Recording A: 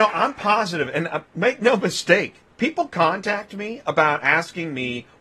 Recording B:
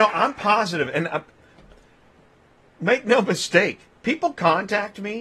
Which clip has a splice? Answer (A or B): A